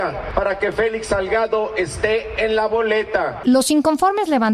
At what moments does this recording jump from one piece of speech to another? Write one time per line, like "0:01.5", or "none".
0:03.4